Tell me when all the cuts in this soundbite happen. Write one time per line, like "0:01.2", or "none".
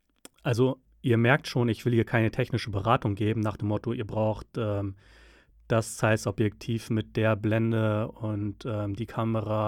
none